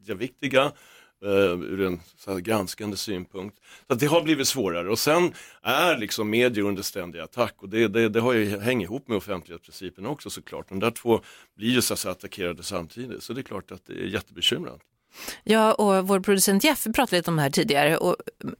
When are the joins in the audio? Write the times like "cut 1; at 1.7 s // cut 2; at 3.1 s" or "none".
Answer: none